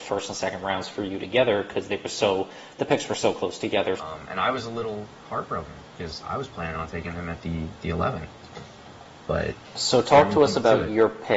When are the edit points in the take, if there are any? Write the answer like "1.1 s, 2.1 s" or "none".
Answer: 4.0 s